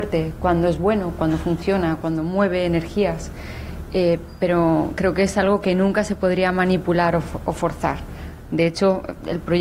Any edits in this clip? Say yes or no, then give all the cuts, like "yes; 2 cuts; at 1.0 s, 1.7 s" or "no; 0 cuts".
no; 0 cuts